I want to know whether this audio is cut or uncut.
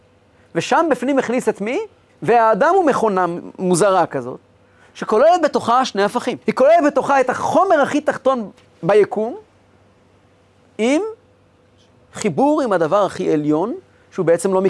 cut